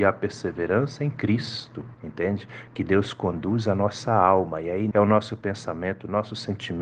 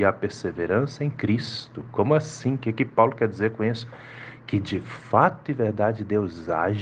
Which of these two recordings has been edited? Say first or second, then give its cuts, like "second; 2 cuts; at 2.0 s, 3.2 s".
first; 2 cuts; at 1.9 s, 4.9 s